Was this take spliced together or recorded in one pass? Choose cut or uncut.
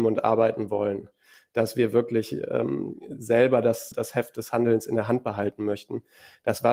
cut